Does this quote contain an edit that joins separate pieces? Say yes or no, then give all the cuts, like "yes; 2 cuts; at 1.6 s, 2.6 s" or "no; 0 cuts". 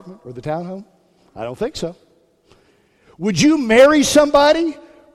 no; 0 cuts